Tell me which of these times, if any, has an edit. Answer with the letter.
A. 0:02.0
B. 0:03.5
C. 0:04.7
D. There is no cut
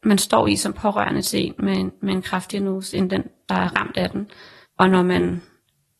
D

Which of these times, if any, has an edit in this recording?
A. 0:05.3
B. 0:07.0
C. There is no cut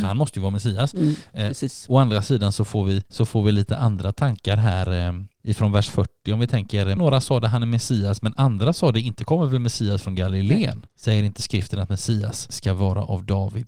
B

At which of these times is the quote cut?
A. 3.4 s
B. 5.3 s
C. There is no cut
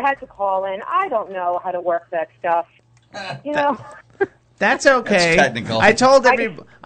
C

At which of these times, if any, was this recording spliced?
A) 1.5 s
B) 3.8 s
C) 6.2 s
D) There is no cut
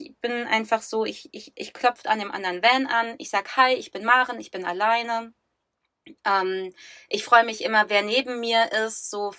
A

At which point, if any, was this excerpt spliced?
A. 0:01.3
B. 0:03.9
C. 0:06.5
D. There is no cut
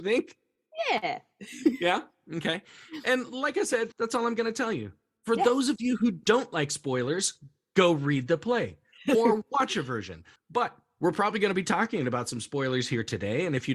B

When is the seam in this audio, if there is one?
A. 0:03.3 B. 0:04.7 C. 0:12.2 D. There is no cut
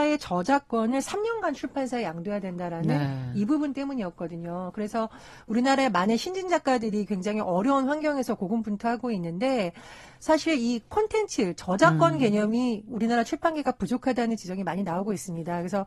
D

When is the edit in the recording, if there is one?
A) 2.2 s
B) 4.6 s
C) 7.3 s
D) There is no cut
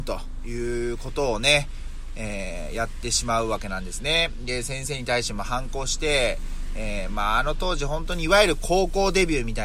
D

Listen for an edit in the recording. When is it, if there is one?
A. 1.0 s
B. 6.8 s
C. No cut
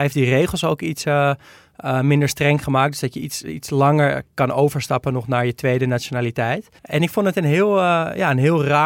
B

